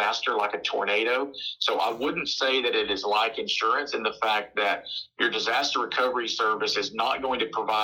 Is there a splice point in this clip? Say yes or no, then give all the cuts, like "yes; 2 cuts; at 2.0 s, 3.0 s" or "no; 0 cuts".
yes; 1 cut; at 1.6 s